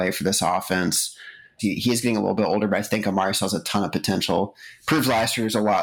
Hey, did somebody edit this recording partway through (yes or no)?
yes